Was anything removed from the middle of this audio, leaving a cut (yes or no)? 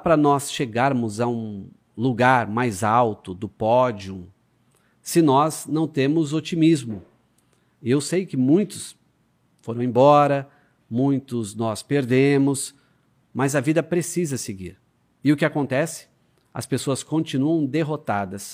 yes